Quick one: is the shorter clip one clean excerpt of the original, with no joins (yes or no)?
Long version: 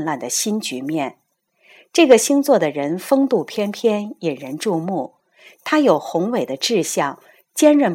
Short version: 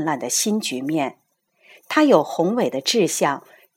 no